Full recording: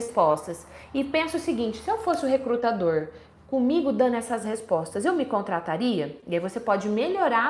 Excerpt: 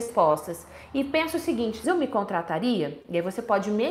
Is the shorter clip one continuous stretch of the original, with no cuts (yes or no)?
no